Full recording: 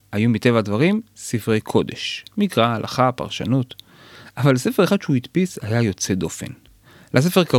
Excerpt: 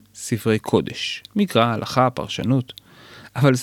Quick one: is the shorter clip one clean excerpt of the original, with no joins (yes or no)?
yes